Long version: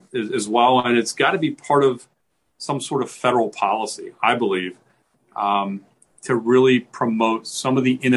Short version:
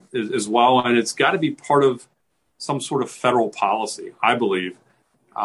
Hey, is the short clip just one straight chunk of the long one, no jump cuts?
yes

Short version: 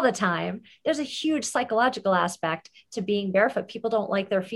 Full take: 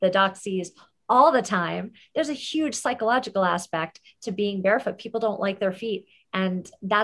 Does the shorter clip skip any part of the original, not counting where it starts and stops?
no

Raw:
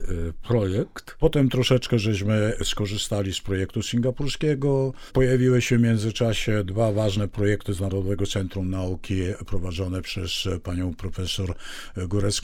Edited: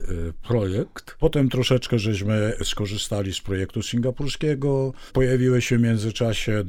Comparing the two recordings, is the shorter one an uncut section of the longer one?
yes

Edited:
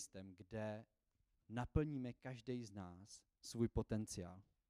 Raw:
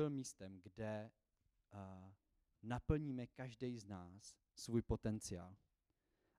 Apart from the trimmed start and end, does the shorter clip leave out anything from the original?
yes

